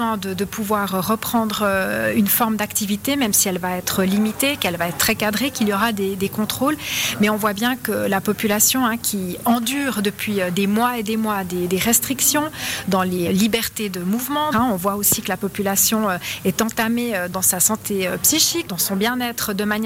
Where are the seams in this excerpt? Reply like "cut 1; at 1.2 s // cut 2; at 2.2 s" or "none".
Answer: cut 1; at 13.3 s // cut 2; at 14.5 s